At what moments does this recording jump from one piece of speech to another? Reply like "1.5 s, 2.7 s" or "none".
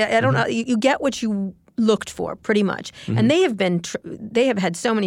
none